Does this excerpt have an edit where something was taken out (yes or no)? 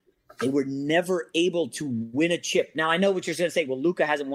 no